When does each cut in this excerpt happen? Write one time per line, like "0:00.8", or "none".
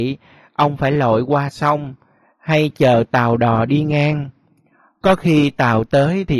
none